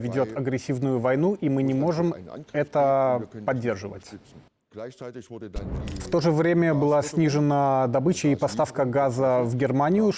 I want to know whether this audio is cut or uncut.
uncut